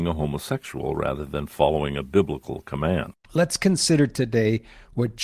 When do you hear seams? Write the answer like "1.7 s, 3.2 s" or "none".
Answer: 3.2 s